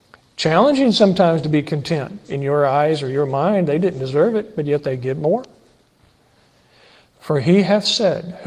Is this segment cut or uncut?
cut